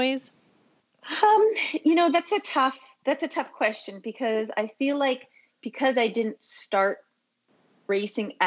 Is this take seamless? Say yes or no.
yes